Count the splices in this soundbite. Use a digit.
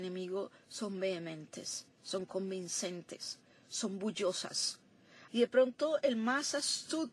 1